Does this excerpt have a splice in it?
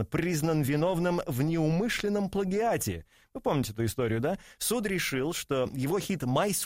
no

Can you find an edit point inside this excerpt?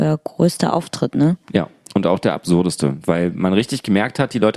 no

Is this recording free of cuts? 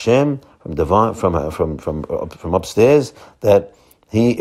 yes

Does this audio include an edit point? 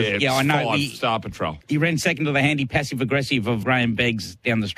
yes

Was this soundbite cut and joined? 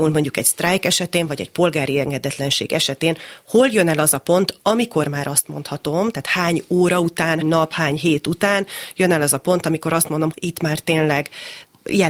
yes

